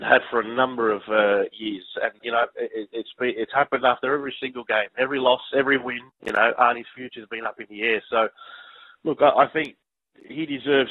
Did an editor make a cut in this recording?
yes; 1 cut; at 2.2 s

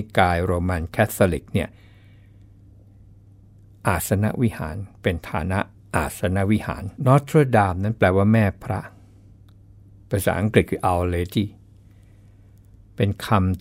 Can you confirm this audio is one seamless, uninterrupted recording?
no; 1 cut; at 7.0 s

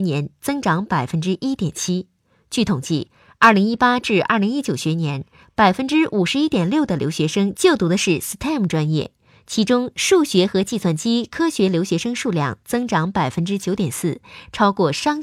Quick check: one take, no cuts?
yes; 0 cuts

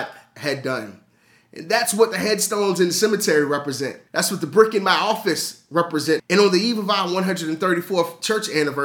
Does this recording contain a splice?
yes; 2 cuts; at 4.1 s, 6.2 s

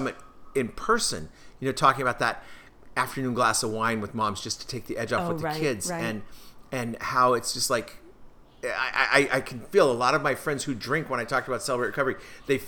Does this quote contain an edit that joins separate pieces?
no; 0 cuts

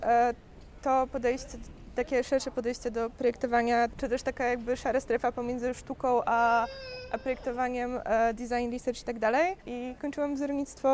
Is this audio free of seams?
no; 2 cuts; at 3.9 s, 9.6 s

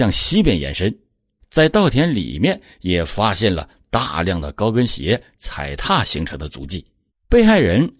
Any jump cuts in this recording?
yes; 1 cut; at 7.1 s

